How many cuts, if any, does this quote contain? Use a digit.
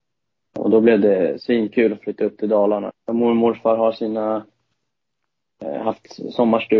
1